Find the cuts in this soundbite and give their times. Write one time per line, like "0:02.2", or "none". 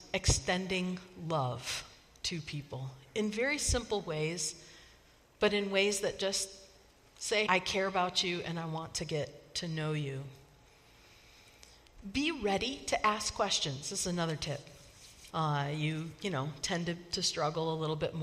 0:07.5
0:15.3